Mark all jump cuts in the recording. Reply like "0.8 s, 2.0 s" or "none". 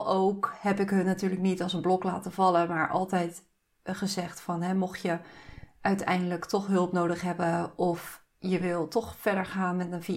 none